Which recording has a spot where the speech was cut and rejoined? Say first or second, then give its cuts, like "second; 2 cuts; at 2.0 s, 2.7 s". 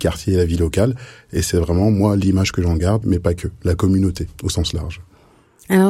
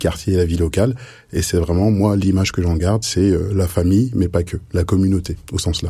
first; 1 cut; at 3.0 s